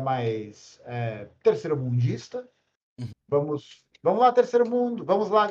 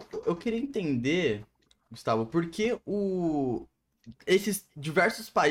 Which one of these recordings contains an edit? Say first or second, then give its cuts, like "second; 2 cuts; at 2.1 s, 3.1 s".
first; 1 cut; at 3.1 s